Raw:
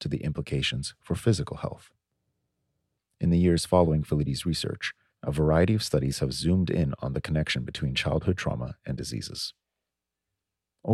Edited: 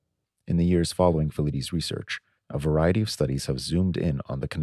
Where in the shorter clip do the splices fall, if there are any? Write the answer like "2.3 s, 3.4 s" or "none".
none

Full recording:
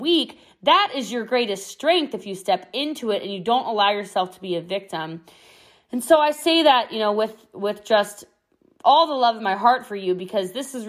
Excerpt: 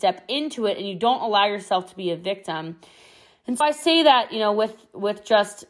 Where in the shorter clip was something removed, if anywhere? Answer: 3.6 s

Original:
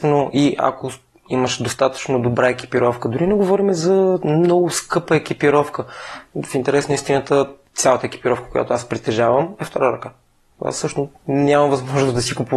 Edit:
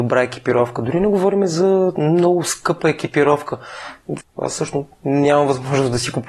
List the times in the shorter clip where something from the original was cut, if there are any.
4.2 s

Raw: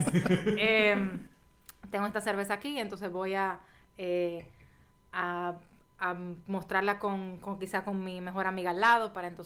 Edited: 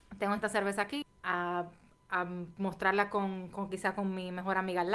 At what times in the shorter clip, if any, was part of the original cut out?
1.0 s

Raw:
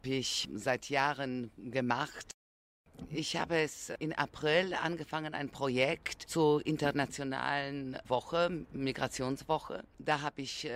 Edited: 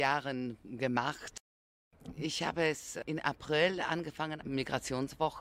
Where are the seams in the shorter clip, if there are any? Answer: 4.4 s

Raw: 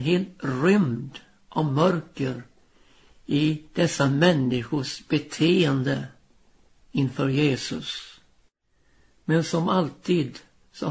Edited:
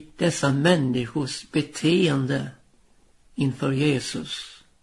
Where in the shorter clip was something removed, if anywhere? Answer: none

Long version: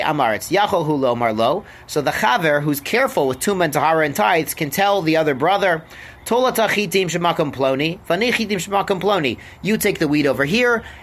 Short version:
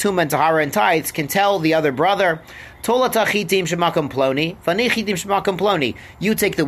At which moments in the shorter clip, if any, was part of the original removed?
none

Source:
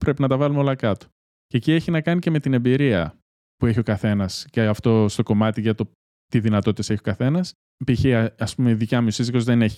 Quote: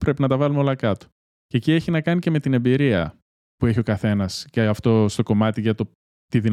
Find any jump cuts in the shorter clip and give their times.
none

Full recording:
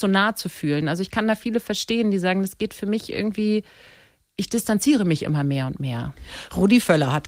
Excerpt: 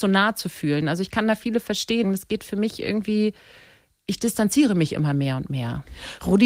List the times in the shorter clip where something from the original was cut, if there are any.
2.0 s

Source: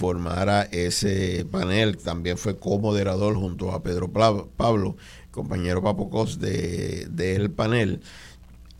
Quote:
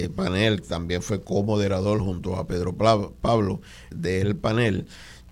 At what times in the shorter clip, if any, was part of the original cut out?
3.9 s

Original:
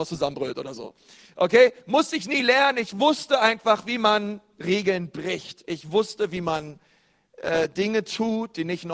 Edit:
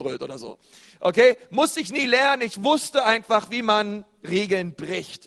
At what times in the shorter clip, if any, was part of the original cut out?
none

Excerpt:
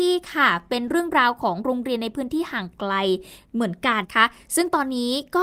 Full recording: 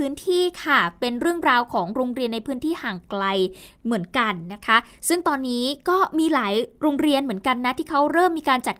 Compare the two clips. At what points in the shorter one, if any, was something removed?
4.0 s

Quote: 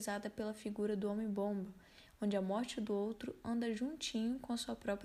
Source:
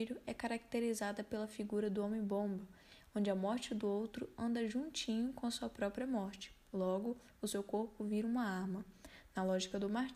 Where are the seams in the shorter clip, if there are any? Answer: none

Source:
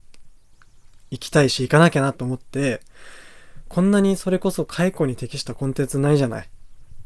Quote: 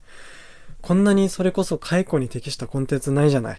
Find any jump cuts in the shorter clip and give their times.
none

